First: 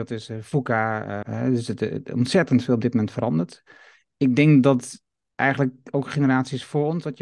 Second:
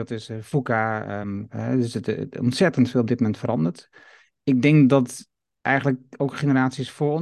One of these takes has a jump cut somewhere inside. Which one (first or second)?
first